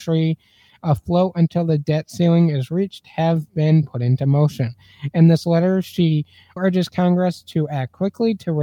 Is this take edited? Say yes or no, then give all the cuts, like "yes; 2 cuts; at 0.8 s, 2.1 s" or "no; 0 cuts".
yes; 1 cut; at 6.6 s